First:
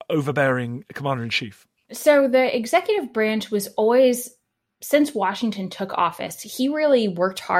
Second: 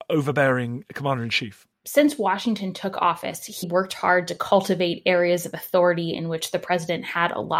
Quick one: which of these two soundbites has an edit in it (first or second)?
second